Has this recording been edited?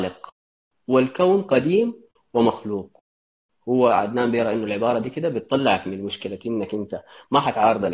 no; 0 cuts

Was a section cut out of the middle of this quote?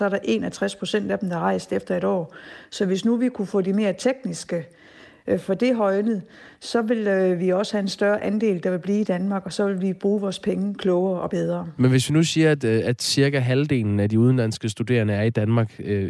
no; 0 cuts

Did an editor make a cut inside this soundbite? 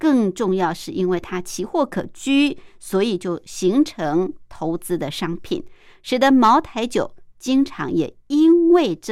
no; 0 cuts

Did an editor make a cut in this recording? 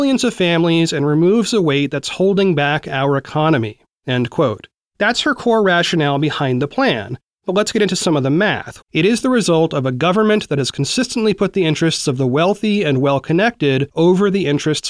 yes; 1 cut; at 8.8 s

